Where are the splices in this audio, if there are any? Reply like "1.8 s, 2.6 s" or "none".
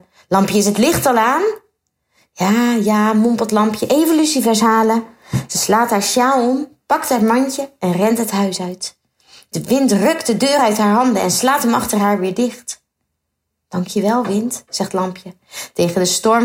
none